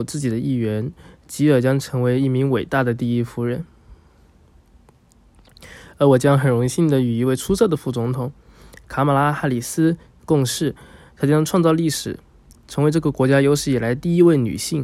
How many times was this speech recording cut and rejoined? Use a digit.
0